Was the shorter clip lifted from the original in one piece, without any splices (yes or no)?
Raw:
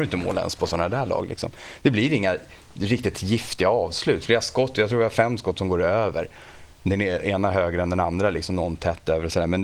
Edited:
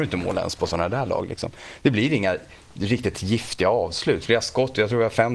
yes